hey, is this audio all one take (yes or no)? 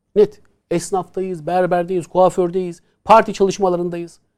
yes